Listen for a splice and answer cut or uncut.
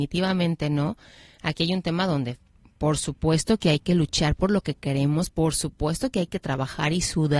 cut